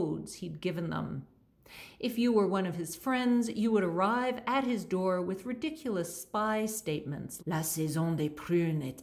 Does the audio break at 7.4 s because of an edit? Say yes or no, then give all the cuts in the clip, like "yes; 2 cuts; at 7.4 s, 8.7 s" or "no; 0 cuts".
yes; 1 cut; at 7.4 s